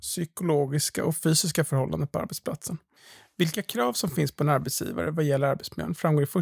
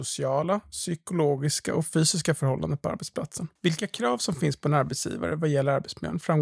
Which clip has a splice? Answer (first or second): second